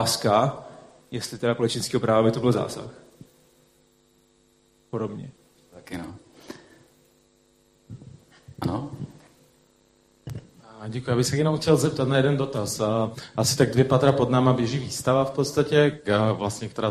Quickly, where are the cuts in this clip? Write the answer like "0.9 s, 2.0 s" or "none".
none